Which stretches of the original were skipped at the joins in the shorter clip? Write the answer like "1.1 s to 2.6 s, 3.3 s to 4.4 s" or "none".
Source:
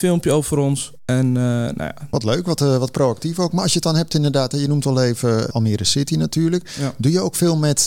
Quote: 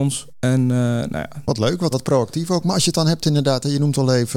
2.6 s to 2.8 s